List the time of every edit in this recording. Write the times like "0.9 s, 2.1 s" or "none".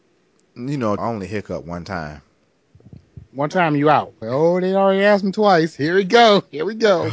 1.0 s, 4.2 s

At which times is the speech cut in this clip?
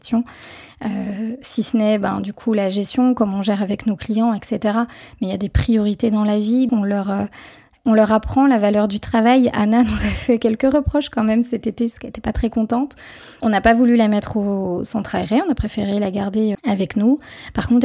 6.7 s, 16.5 s

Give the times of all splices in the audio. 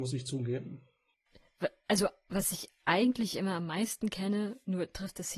none

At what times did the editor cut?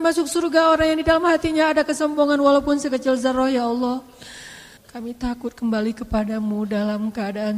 4.8 s

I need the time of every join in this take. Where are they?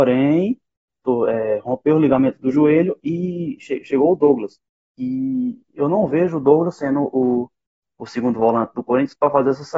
none

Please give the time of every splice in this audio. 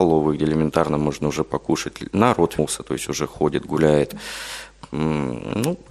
2.6 s

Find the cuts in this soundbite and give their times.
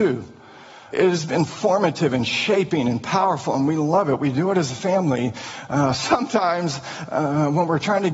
none

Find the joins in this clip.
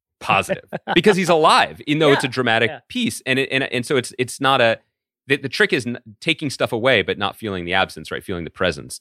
none

